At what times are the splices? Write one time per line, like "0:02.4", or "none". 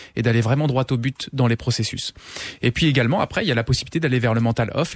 none